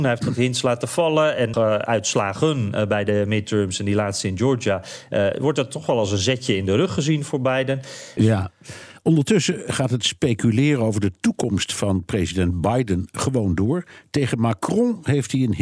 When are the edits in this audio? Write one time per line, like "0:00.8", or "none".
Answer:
0:01.5
0:08.2